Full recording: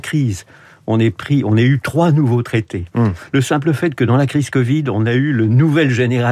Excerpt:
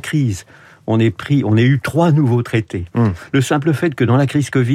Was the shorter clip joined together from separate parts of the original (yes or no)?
no